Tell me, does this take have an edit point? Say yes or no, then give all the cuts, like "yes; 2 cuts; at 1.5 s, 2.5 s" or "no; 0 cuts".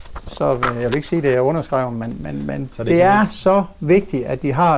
no; 0 cuts